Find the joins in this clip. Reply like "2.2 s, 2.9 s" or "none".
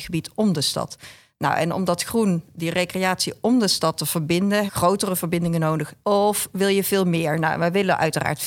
4.7 s, 6.0 s